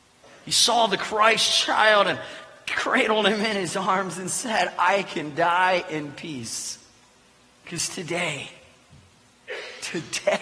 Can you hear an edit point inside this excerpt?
no; 0 cuts

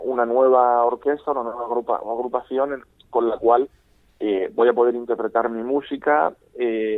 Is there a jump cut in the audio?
no; 0 cuts

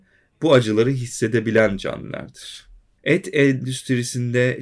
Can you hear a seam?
yes; 1 cut; at 3.0 s

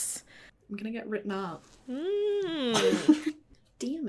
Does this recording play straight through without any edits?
yes; 0 cuts

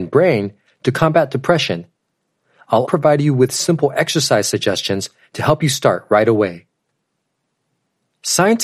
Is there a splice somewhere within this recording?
yes; 1 cut; at 2.8 s

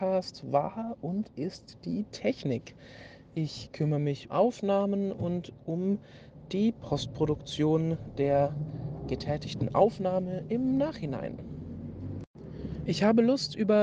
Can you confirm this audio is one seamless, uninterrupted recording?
no; 2 cuts; at 4.3 s, 12.9 s

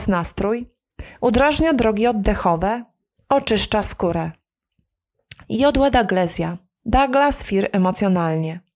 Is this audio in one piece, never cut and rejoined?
yes; 0 cuts

